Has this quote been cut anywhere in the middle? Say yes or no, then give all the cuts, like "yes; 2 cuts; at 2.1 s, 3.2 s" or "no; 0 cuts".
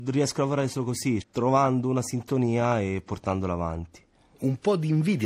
yes; 1 cut; at 1.2 s